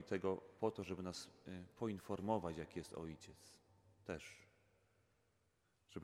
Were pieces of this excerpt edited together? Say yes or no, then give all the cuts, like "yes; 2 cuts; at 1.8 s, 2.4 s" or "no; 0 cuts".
no; 0 cuts